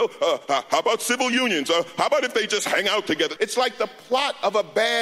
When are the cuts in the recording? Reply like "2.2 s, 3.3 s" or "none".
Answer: 3.4 s